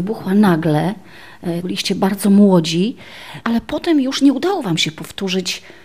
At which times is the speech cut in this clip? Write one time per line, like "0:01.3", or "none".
0:01.6
0:03.4